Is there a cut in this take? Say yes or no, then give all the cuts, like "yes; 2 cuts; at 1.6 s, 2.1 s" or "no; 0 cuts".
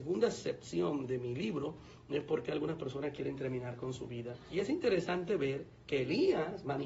no; 0 cuts